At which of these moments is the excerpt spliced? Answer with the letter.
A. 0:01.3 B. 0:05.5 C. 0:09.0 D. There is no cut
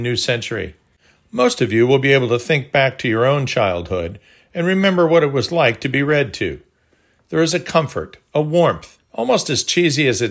C